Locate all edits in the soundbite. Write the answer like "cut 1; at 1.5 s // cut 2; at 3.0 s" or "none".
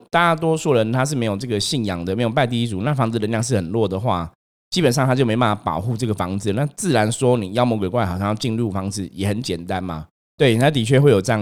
cut 1; at 10.4 s

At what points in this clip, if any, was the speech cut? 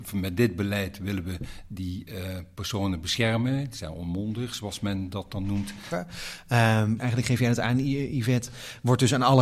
cut 1; at 5.9 s // cut 2; at 7.0 s

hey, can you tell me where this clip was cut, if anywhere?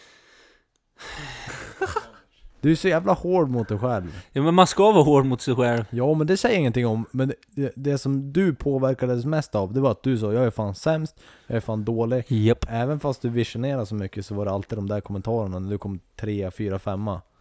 cut 1; at 1.5 s

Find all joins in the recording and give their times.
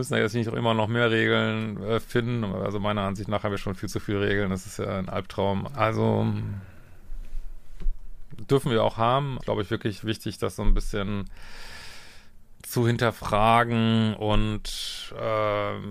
cut 1; at 5.7 s // cut 2; at 9.4 s

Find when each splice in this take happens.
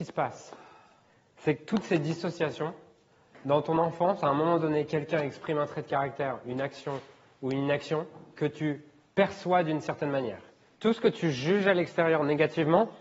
cut 1; at 10.8 s

